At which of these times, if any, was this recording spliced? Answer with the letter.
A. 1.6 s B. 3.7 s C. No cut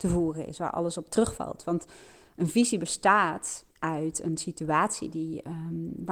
B